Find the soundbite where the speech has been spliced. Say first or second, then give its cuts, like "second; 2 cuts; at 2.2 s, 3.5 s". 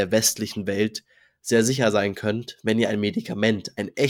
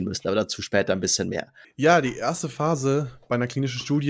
second; 1 cut; at 1.6 s